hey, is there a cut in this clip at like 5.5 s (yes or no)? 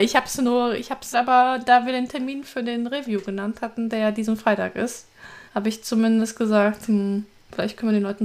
yes